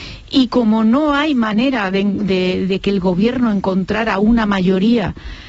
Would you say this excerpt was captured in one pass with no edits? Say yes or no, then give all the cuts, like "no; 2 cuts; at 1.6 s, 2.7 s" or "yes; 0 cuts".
yes; 0 cuts